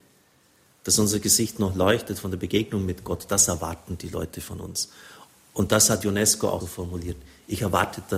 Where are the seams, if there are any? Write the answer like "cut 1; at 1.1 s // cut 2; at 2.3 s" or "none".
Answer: cut 1; at 6.6 s